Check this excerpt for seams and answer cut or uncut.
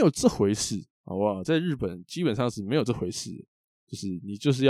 uncut